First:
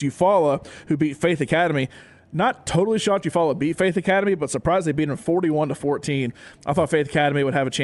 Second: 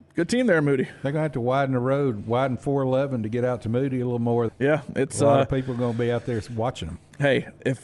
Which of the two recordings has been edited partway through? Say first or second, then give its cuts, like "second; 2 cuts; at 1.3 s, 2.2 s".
second; 1 cut; at 4.5 s